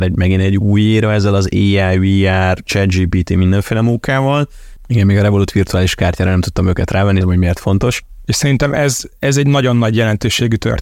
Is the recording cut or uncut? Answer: cut